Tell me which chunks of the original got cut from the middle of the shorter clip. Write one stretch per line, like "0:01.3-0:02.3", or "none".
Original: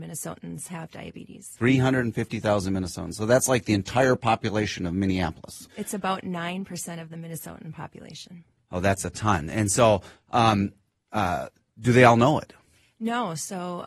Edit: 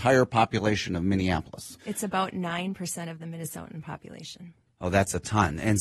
none